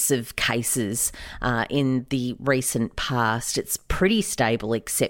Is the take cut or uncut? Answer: uncut